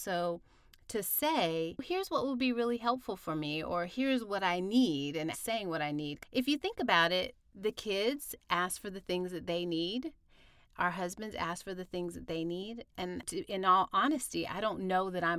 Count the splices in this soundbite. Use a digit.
1